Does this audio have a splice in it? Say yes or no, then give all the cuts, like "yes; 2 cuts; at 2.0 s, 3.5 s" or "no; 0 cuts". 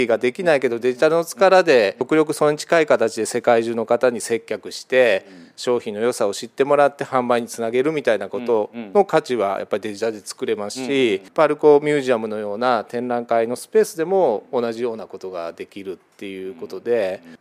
no; 0 cuts